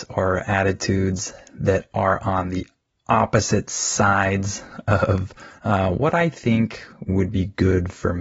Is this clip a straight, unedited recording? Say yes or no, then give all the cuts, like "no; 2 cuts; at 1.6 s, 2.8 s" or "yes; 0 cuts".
no; 1 cut; at 5.6 s